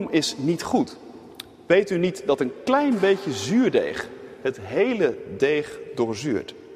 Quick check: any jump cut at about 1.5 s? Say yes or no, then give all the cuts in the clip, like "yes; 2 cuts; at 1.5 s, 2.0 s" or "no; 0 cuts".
no; 0 cuts